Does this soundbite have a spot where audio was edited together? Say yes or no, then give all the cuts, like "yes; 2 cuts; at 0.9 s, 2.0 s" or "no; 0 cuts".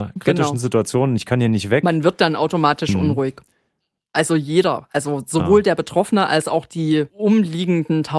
no; 0 cuts